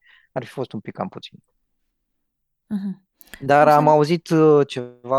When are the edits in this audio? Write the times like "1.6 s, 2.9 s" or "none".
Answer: 1.5 s